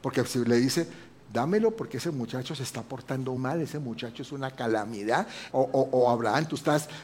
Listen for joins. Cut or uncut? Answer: cut